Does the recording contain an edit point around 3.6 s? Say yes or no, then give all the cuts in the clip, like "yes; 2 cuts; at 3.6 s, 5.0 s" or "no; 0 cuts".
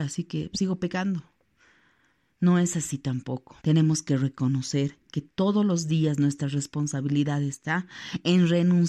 yes; 1 cut; at 3.6 s